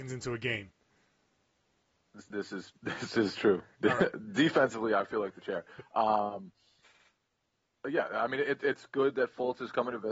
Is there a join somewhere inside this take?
no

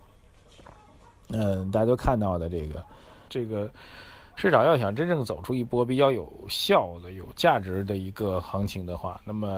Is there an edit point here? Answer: yes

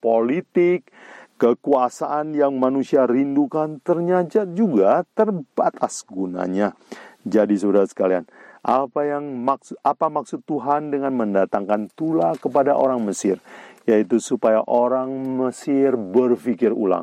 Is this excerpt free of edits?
yes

